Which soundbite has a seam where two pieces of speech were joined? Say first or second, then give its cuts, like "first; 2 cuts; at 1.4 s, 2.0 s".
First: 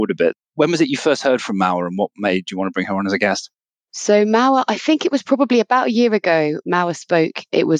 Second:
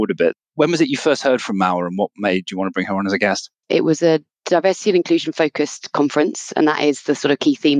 second; 1 cut; at 3.6 s